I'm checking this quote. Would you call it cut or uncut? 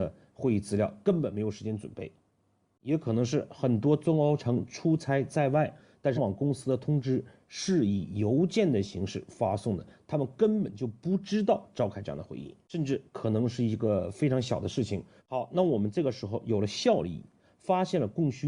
cut